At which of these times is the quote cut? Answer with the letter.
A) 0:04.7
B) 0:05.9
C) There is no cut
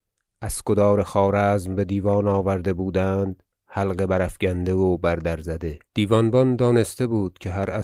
B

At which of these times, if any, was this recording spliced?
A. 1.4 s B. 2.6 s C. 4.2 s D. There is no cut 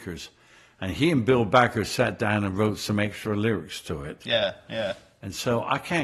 D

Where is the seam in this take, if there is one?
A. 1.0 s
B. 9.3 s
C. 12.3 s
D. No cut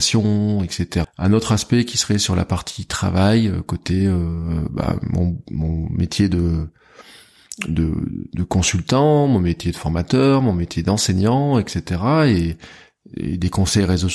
A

